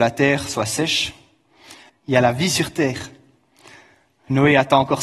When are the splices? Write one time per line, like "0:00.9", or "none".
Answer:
0:01.9